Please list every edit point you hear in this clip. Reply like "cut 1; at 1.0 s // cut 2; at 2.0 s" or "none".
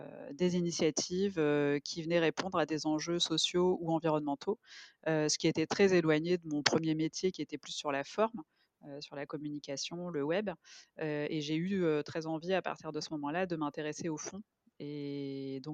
none